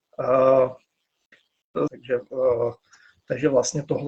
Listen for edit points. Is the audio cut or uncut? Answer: cut